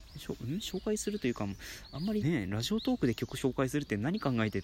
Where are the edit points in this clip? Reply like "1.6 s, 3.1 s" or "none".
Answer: 2.2 s